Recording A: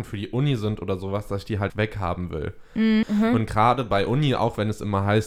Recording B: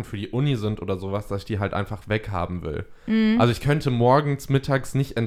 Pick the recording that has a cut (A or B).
A